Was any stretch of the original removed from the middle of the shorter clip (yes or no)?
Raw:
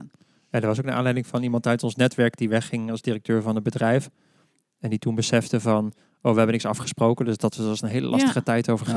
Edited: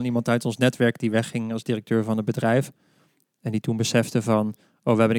no